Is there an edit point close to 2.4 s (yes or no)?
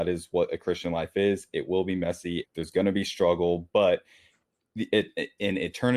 yes